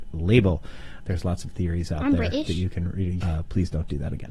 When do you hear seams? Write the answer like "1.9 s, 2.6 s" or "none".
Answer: 1.0 s, 3.2 s